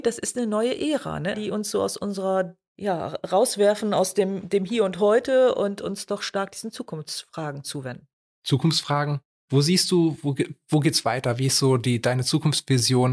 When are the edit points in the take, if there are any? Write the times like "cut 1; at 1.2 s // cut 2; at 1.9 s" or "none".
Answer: cut 1; at 1.3 s